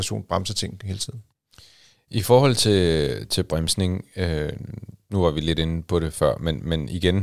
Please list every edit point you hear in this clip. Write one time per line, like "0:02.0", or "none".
none